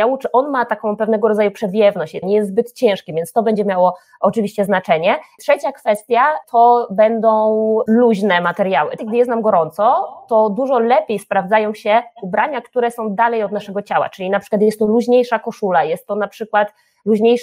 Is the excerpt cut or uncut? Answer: cut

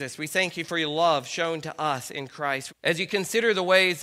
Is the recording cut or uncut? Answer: cut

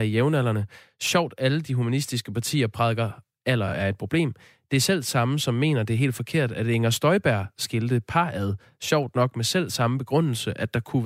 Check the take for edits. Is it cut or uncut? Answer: uncut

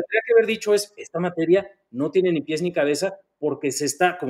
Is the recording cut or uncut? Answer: uncut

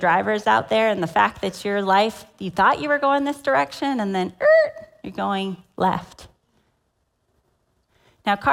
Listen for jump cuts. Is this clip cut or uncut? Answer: uncut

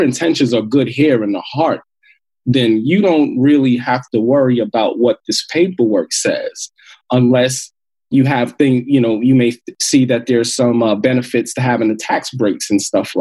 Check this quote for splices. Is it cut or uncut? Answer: uncut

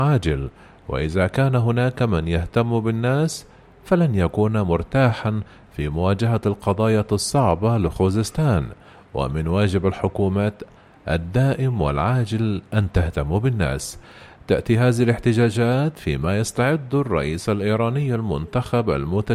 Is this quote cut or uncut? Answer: uncut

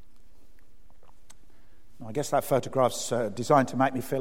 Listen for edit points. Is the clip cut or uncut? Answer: uncut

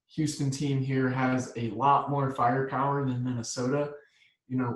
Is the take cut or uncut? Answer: uncut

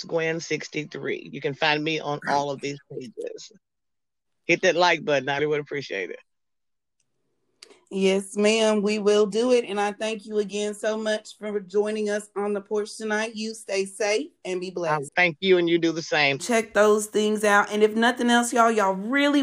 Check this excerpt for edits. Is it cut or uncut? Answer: cut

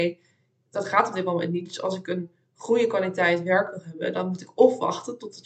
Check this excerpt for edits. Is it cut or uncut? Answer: uncut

